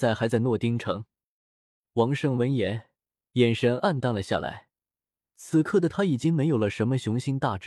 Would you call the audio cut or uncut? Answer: cut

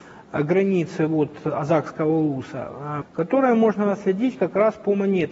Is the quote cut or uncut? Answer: cut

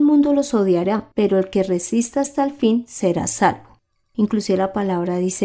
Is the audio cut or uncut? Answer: cut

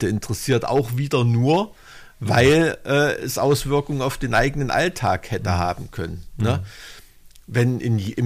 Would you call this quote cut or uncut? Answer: uncut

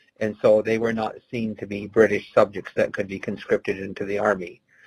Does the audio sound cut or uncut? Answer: uncut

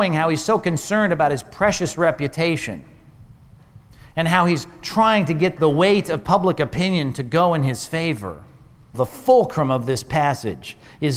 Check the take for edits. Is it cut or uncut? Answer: cut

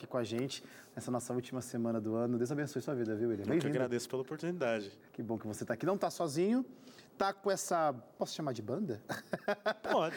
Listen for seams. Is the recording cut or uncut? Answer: cut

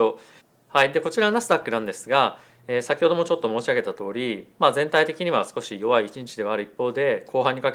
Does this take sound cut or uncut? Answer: uncut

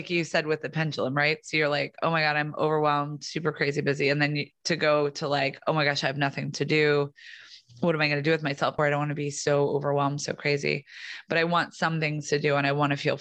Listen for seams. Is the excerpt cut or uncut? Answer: cut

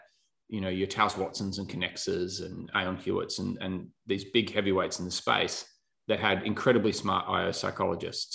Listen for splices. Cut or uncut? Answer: uncut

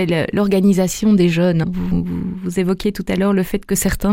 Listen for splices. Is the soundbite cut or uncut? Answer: cut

